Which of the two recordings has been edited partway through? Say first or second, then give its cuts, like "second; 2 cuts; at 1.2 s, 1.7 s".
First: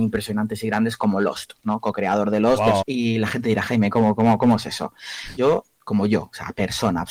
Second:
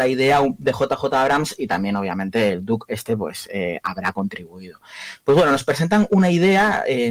first; 2 cuts; at 2.8 s, 5.4 s